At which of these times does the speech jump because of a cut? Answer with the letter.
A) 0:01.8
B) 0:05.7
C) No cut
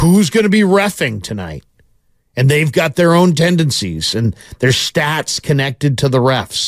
C